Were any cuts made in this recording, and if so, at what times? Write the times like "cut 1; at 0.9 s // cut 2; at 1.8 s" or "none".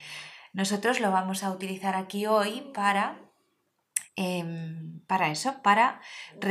none